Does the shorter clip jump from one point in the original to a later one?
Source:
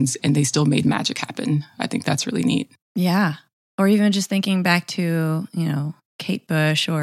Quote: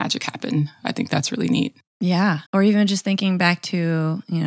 yes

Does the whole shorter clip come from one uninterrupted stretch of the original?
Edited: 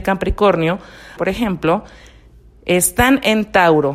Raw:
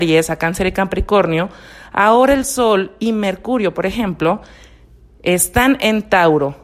no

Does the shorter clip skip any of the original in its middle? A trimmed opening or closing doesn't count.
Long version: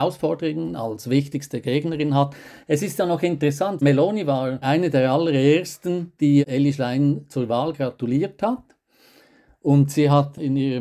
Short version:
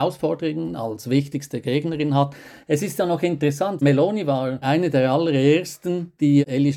no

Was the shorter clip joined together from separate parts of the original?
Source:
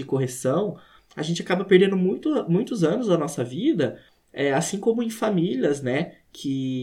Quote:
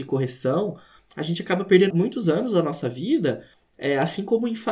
yes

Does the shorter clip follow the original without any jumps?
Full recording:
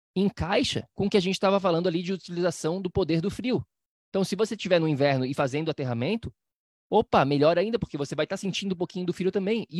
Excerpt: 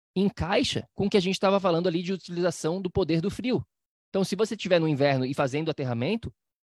yes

